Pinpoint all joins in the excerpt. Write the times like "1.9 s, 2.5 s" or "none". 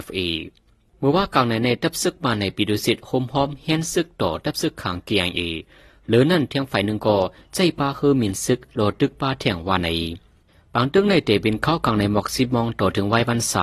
none